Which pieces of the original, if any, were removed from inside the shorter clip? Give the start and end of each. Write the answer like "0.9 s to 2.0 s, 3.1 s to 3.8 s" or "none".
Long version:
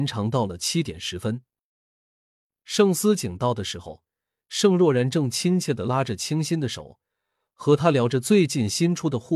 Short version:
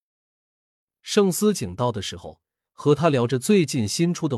4.3 s to 7.5 s